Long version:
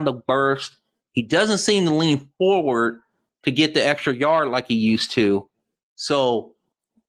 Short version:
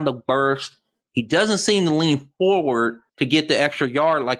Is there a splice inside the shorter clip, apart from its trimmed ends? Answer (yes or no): yes